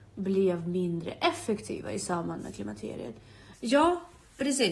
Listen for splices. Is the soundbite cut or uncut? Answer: cut